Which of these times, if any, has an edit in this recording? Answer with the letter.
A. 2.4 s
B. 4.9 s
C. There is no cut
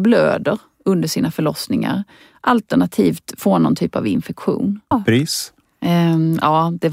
B